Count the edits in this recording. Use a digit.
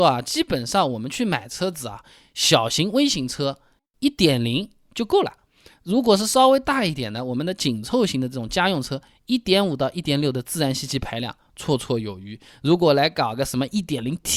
0